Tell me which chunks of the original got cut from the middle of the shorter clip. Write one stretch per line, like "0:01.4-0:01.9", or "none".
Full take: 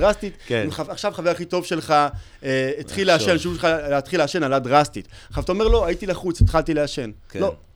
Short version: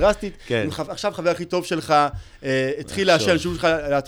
none